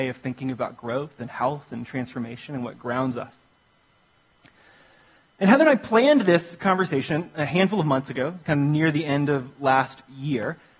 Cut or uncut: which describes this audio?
uncut